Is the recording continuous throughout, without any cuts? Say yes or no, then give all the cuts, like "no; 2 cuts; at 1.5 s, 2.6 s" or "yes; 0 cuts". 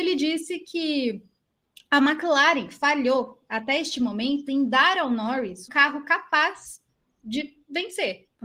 no; 1 cut; at 5.7 s